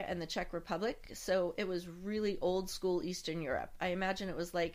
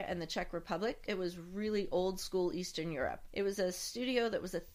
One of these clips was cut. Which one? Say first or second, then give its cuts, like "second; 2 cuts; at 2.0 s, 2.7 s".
second; 2 cuts; at 1.1 s, 3.3 s